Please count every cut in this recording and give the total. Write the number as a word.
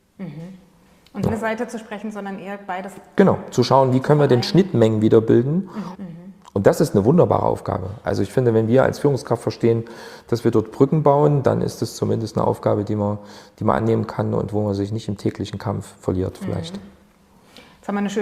two